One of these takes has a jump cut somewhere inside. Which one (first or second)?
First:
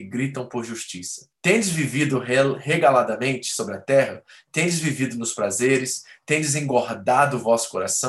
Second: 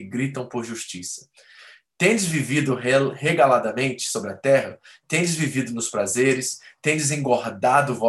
first